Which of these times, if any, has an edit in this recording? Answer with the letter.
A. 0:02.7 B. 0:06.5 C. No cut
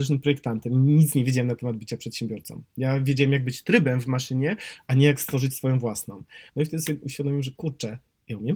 B